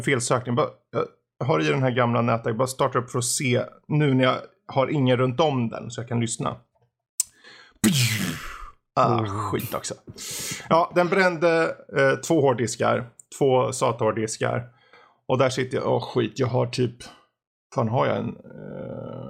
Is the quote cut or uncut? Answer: uncut